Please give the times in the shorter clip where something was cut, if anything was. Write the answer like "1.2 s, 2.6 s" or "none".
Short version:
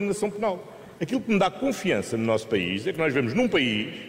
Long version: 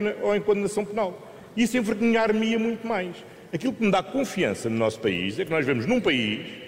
0.9 s